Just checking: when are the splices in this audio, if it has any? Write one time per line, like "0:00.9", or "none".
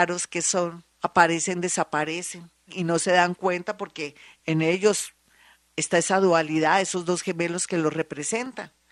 0:00.9
0:02.7